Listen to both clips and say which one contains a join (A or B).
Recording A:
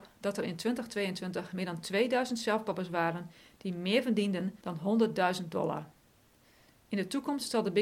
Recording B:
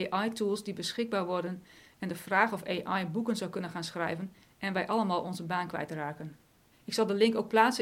B